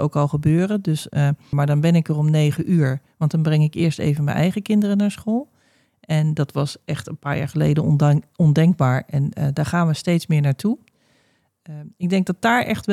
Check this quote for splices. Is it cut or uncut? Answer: cut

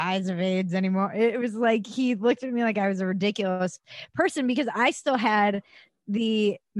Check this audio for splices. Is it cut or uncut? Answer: uncut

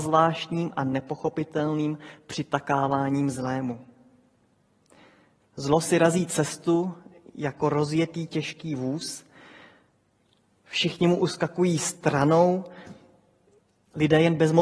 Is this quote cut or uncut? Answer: cut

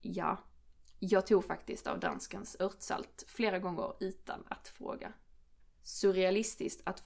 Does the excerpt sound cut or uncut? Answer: cut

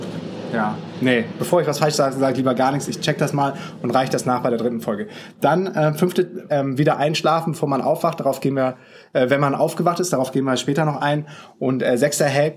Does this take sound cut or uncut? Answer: cut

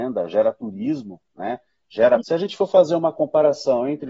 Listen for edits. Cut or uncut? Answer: cut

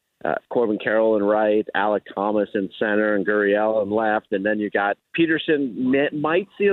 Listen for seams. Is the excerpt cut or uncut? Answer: cut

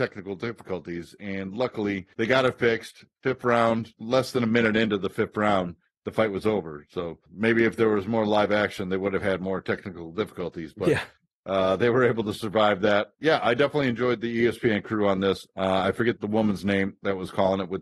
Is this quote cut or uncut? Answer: cut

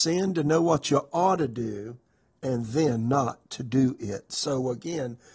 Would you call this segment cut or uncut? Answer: uncut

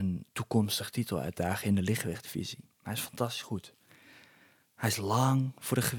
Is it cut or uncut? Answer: uncut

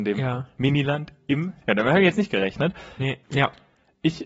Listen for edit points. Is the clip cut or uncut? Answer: cut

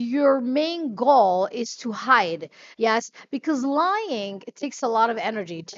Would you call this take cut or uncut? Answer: cut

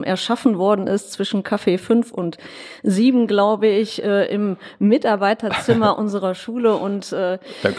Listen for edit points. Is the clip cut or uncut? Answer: uncut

